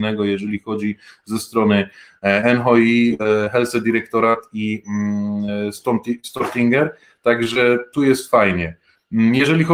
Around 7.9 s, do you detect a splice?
yes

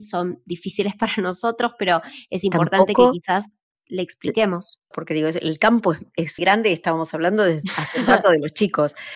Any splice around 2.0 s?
no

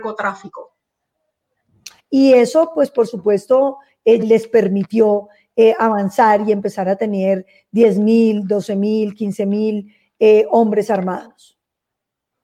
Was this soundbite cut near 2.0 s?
yes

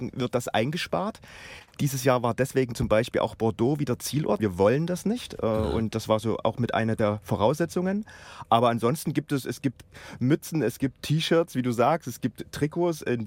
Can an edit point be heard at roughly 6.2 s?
no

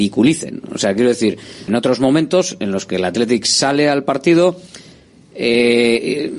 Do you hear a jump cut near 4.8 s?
no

